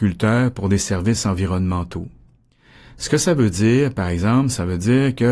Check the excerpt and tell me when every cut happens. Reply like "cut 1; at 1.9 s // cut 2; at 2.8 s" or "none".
none